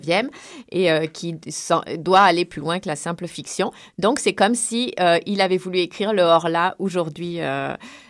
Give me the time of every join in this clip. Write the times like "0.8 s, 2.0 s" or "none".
none